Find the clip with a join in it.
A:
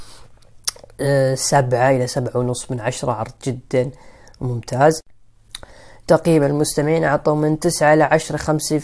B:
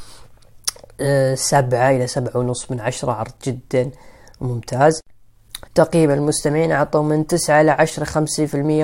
B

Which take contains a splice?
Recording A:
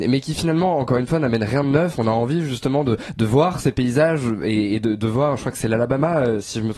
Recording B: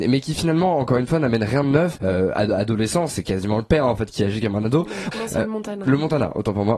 B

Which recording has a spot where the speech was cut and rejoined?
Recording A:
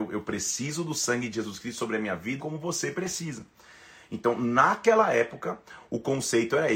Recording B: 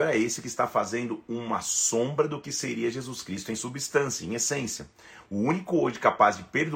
A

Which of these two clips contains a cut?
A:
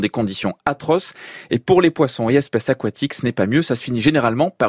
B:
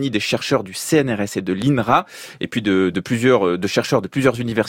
B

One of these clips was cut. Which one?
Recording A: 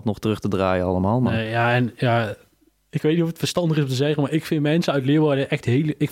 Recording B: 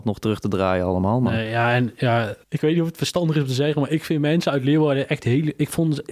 B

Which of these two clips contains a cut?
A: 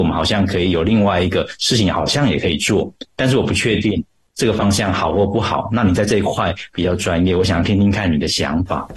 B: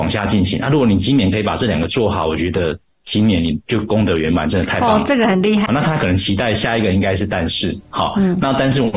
B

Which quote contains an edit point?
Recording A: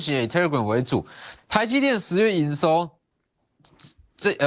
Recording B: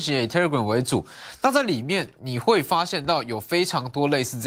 A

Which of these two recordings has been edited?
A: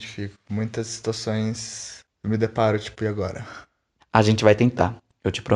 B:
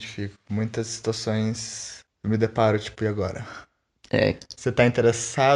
A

